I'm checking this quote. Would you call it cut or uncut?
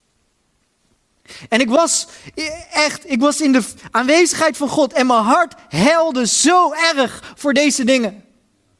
uncut